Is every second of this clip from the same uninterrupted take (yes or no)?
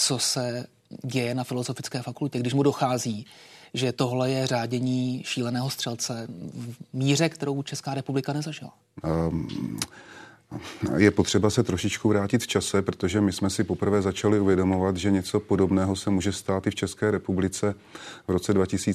no